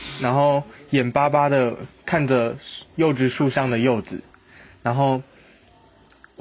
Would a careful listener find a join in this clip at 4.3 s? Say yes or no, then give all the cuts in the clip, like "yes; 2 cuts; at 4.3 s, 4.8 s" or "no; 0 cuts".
no; 0 cuts